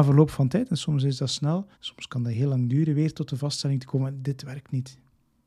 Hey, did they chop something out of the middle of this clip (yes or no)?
yes